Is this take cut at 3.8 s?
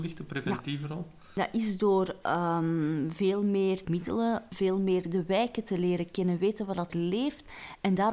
yes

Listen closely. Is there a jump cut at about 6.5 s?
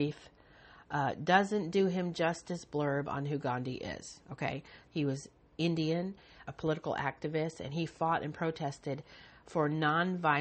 yes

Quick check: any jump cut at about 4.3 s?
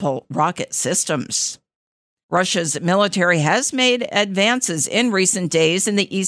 no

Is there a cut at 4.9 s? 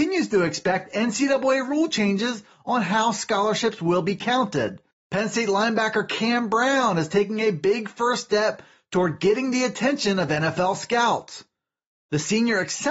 yes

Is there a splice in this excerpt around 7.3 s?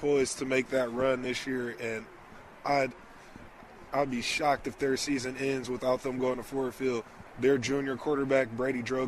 yes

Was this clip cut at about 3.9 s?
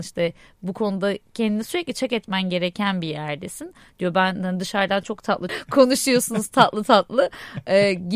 no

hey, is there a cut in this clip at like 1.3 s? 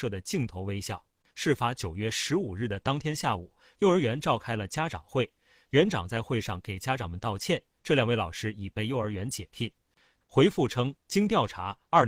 yes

